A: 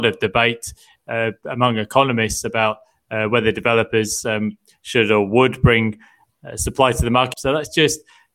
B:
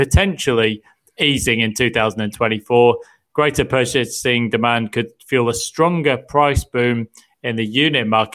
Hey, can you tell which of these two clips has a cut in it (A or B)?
A